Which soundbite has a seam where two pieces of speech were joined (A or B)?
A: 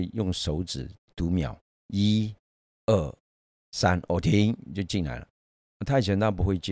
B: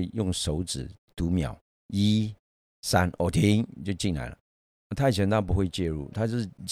B